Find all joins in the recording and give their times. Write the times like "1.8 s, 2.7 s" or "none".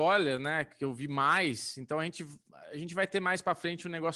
none